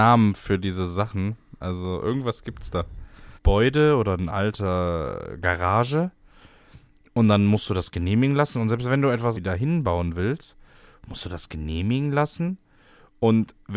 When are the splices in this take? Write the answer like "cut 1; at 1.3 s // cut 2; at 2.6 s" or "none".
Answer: cut 1; at 3.4 s // cut 2; at 9.3 s